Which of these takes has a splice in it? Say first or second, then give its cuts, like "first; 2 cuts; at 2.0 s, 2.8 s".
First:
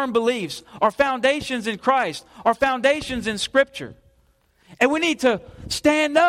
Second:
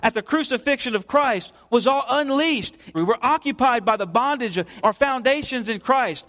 second; 2 cuts; at 2.9 s, 4.8 s